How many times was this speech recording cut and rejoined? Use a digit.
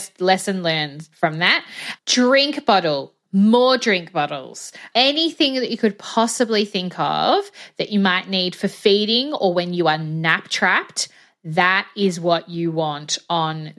0